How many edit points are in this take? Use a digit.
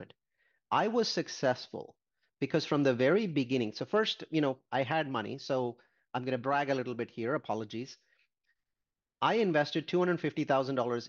0